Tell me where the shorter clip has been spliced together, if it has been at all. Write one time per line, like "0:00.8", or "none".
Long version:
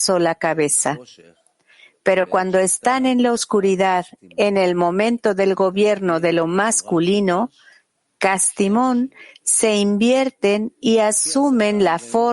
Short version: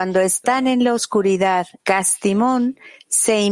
0:01.8